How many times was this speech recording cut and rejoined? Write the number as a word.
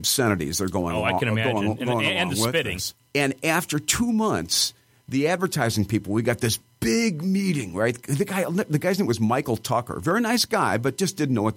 one